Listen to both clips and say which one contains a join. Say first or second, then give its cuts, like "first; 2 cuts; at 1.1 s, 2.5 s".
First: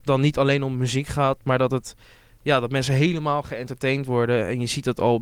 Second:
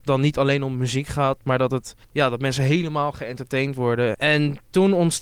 second; 2 cuts; at 2.0 s, 4.1 s